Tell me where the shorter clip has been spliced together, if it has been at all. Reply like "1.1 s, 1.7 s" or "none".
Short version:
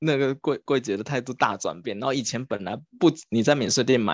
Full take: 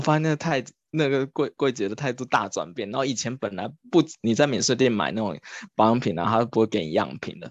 none